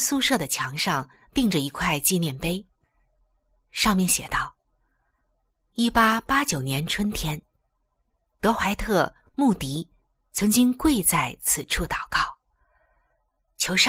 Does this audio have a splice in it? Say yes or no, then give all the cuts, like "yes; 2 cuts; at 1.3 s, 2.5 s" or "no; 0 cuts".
no; 0 cuts